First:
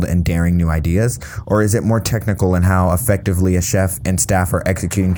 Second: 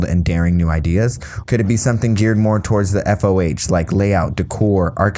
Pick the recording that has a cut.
second; 1 cut; at 1.4 s

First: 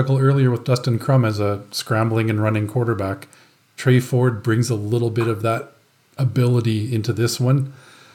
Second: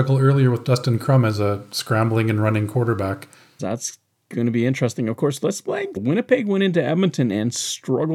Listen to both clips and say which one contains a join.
second; 2 cuts; at 3.6 s, 6.0 s

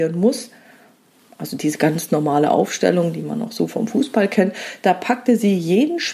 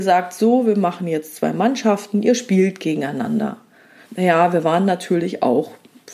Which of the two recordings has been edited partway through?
second; 1 cut; at 4.0 s

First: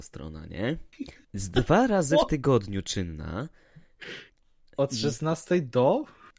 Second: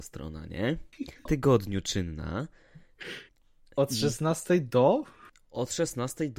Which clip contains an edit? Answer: second; 1 cut; at 1.3 s

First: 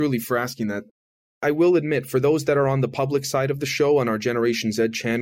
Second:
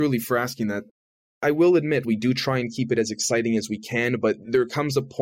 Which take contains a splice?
second; 1 cut; at 2.0 s

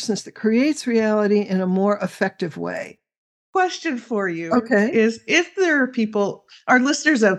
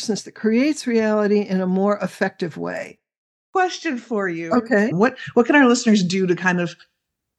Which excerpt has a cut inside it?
second; 1 cut; at 4.9 s

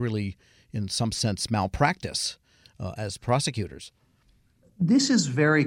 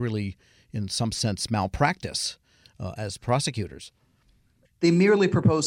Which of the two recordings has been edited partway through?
second; 1 cut; at 4.6 s

